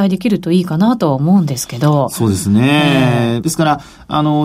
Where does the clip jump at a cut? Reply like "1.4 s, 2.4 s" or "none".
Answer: 3.4 s